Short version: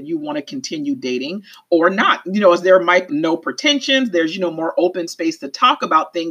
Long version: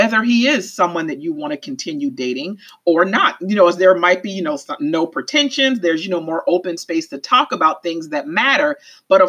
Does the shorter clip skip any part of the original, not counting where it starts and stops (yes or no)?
yes